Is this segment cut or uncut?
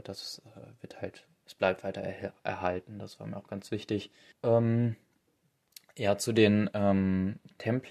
cut